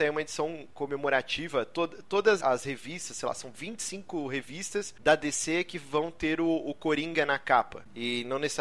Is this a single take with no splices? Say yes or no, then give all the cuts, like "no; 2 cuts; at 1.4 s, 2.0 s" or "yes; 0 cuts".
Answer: no; 1 cut; at 2.4 s